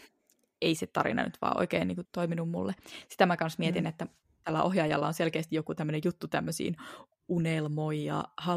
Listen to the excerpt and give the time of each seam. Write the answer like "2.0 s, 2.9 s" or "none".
2.1 s